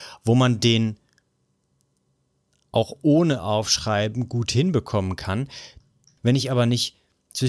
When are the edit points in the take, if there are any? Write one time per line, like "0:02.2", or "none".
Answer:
0:06.2